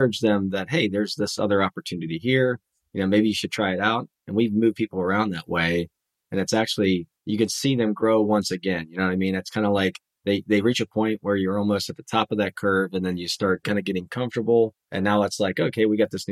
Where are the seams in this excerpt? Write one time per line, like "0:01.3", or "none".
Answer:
0:07.2
0:13.6
0:14.8